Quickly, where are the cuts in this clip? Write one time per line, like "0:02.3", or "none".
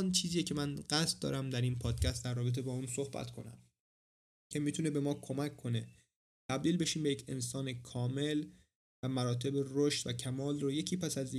none